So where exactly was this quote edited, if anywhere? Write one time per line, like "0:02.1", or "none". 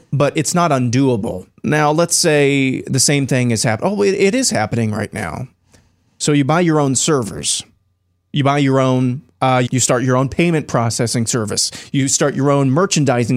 0:01.6
0:09.7